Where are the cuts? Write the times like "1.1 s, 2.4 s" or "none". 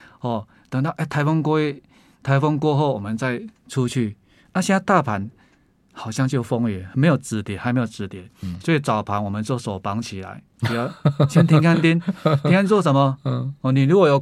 none